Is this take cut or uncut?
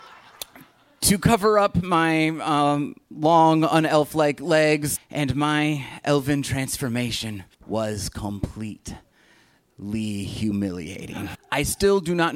cut